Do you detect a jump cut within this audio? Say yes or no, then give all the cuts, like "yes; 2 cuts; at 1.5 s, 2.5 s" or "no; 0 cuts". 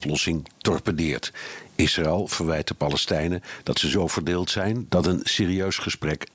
yes; 1 cut; at 4.9 s